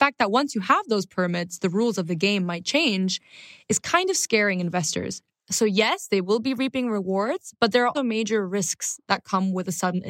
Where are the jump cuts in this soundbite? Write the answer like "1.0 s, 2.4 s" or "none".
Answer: 5.3 s, 7.9 s